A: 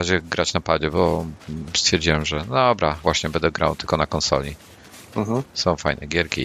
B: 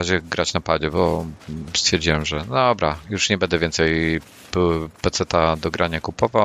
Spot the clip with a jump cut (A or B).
A